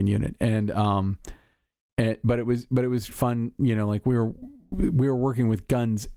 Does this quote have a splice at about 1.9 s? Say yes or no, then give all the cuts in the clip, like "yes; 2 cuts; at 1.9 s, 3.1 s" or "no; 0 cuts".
no; 1 cut; at 3.1 s